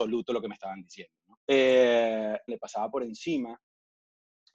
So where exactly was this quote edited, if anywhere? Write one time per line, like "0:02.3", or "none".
0:01.4
0:02.5